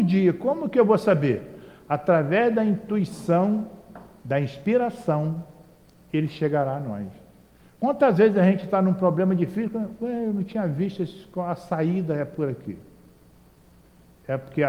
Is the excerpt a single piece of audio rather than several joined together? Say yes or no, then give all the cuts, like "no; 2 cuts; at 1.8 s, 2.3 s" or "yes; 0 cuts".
yes; 0 cuts